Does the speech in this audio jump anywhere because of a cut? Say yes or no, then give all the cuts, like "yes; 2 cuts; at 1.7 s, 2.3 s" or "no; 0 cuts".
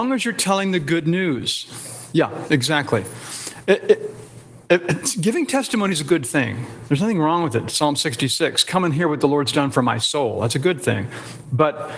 no; 0 cuts